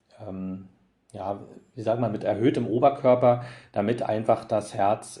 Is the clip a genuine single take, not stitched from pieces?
yes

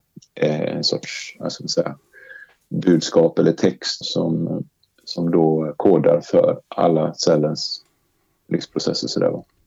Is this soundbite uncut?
no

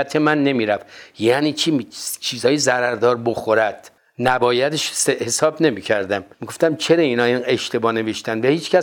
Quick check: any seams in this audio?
yes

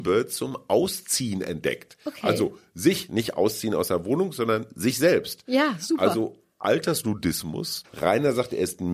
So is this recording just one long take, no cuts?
no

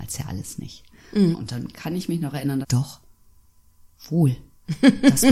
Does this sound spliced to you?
yes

